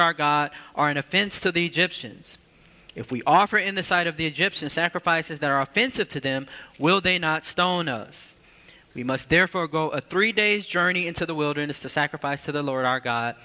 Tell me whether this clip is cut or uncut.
uncut